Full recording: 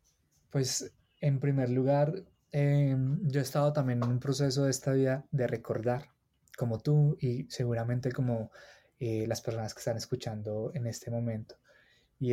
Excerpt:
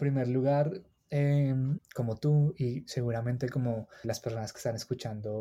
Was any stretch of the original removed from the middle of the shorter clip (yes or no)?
yes